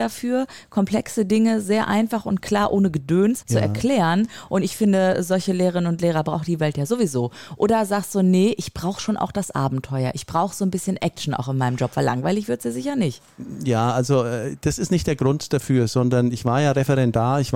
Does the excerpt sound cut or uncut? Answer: cut